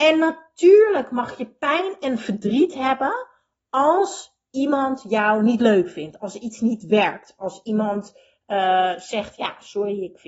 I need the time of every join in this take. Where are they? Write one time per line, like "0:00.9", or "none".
none